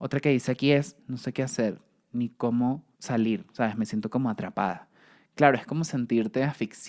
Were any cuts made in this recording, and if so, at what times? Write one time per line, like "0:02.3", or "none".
0:01.0
0:02.9